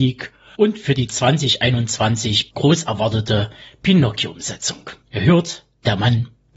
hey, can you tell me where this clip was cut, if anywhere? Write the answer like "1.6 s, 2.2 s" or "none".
5.0 s